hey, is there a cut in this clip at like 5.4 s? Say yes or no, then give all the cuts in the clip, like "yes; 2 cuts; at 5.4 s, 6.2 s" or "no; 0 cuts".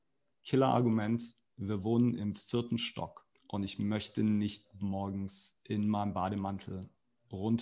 no; 1 cut; at 3.4 s